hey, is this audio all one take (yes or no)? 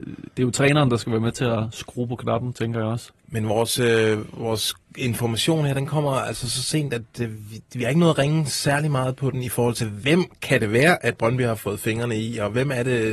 yes